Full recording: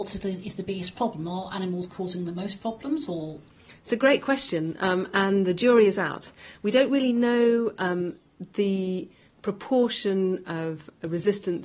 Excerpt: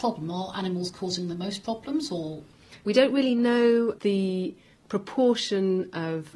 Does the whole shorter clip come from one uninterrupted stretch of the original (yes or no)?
no